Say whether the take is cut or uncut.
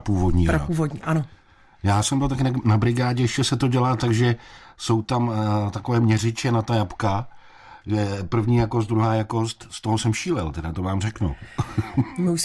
uncut